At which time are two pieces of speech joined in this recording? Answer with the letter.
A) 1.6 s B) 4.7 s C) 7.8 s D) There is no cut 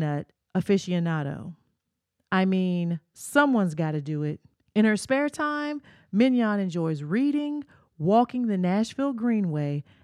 B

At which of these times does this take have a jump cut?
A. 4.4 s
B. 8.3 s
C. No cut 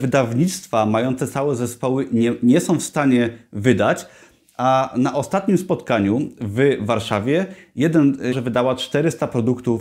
B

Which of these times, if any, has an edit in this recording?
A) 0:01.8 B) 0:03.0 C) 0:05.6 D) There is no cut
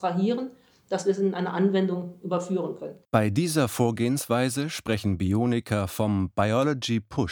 B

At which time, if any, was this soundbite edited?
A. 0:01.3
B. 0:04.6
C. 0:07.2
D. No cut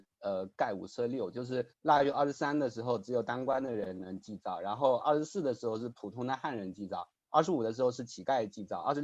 D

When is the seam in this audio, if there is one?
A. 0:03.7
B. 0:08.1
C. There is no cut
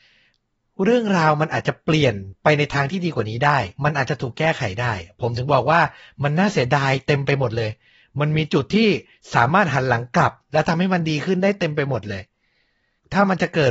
A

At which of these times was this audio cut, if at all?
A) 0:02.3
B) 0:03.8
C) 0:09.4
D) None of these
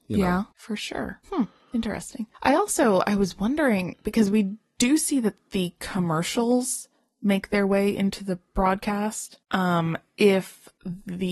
A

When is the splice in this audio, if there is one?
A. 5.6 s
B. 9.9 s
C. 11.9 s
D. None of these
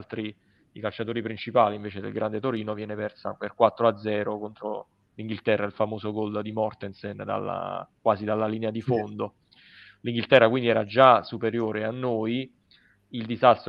D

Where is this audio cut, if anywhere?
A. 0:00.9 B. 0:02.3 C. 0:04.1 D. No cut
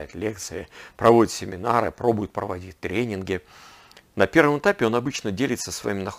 C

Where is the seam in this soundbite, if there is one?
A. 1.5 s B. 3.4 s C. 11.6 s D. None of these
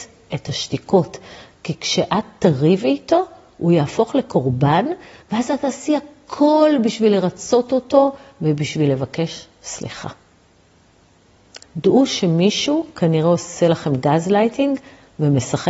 C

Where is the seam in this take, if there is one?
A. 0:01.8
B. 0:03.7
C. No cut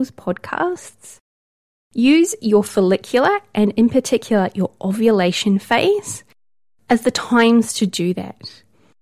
C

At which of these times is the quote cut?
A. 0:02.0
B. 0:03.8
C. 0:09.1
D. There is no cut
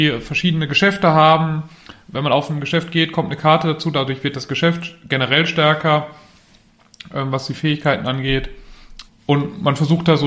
C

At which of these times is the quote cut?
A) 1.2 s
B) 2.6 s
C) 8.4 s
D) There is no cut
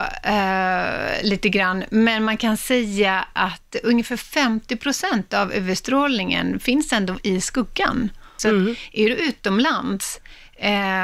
C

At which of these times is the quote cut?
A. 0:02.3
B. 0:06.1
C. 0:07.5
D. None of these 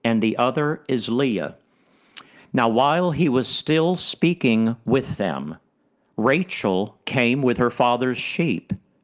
A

